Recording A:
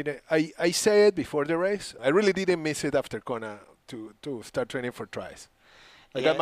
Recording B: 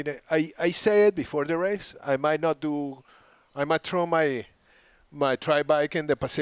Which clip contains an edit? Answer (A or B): A